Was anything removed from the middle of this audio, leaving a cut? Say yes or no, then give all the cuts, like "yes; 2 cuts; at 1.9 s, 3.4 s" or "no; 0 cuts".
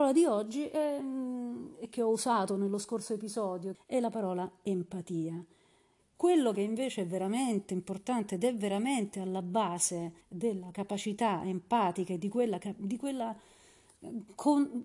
yes; 3 cuts; at 3.7 s, 6.0 s, 10.2 s